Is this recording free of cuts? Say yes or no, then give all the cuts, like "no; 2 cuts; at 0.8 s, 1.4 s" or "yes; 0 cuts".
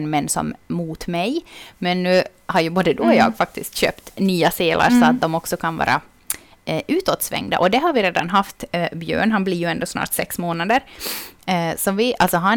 yes; 0 cuts